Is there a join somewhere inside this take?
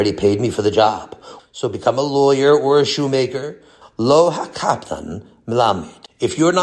yes; 2 cuts; at 1.4 s, 3.8 s

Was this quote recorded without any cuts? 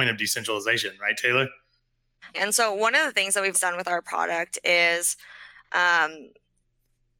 no; 2 cuts; at 2.3 s, 3.5 s

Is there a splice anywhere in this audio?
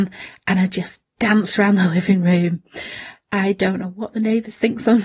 no; 0 cuts

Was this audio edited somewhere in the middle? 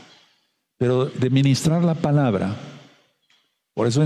yes; 1 cut; at 1.1 s

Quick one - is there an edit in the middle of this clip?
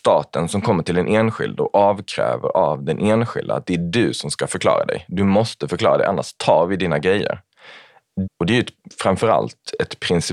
yes; 1 cut; at 8.3 s

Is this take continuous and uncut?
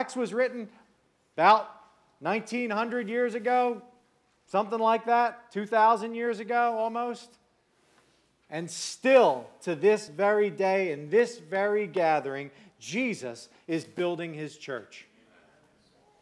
yes; 0 cuts

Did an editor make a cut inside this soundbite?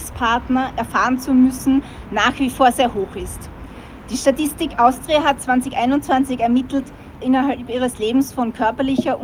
yes; 1 cut; at 7.2 s

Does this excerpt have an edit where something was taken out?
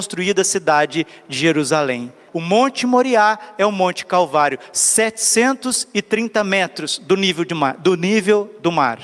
yes; 1 cut; at 2.3 s

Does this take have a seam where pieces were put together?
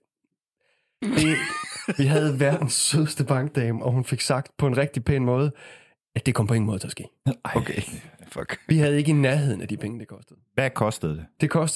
no; 0 cuts

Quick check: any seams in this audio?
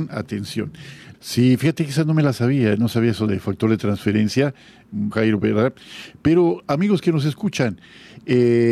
yes; 2 cuts; at 1.1 s, 5.1 s

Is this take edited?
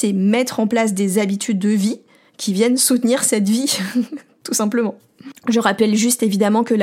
no; 0 cuts

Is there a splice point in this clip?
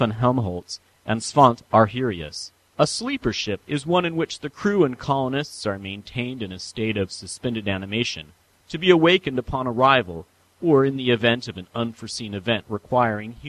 yes; 3 cuts; at 2.6 s, 3.6 s, 8.5 s

